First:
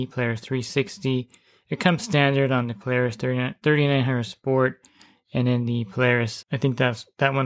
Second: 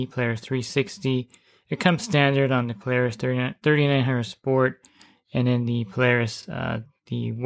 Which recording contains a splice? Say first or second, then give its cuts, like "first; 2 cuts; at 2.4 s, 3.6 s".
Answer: first; 1 cut; at 6.4 s